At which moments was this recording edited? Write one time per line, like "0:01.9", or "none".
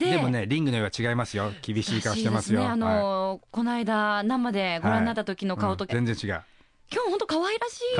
0:05.9

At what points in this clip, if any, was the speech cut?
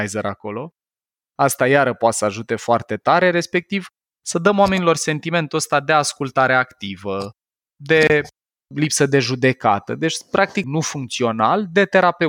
0:10.6

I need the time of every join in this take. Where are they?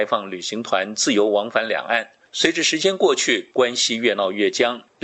0:03.5

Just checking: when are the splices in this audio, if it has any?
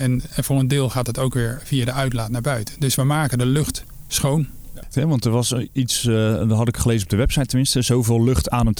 0:04.9

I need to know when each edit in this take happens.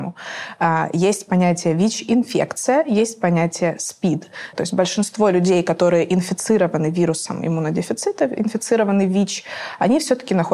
0:04.5

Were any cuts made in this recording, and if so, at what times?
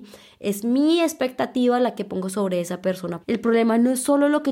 0:03.2

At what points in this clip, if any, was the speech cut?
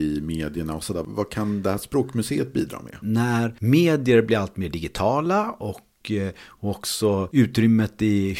0:03.0

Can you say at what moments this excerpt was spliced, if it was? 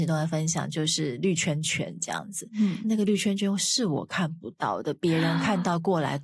0:02.8

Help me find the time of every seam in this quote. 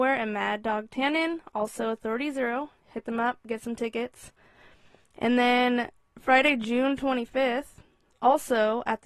none

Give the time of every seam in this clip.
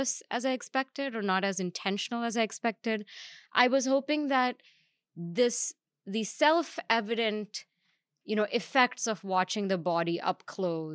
none

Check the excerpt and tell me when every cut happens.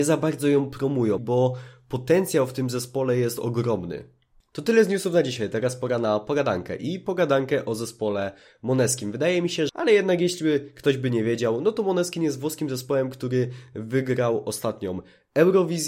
0:01.2
0:09.7

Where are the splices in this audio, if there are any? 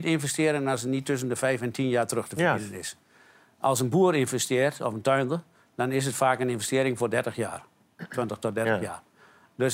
none

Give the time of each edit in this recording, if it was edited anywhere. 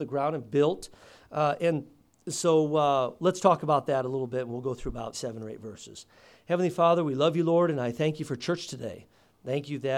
0:05.1

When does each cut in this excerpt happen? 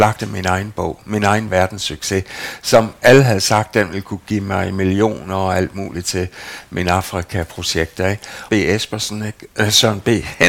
0:08.5

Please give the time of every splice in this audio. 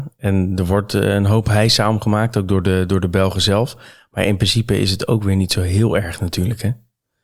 none

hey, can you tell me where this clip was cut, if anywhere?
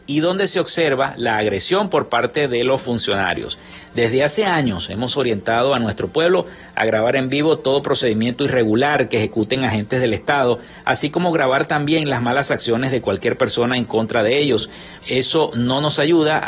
0:15.0

